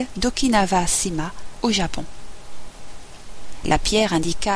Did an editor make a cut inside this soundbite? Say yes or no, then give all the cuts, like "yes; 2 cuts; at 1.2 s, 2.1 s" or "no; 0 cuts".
yes; 1 cut; at 3.6 s